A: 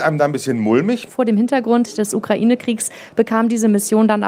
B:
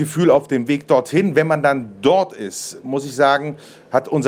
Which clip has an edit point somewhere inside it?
A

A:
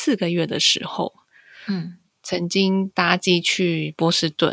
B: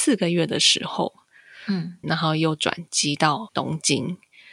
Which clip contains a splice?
B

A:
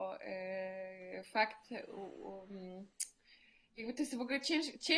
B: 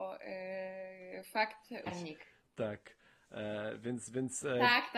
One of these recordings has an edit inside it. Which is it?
B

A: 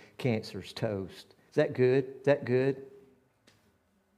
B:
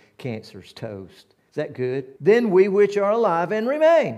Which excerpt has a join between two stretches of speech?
B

